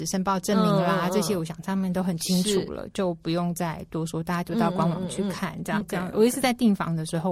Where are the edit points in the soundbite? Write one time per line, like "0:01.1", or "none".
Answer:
0:05.8